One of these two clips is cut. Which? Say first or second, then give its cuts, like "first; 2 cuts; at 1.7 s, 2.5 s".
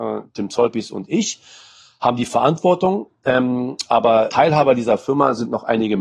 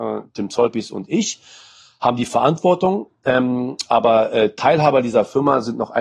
first; 1 cut; at 4.3 s